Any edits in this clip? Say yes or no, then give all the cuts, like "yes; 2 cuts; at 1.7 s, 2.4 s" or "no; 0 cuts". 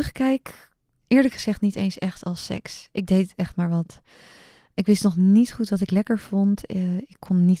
no; 0 cuts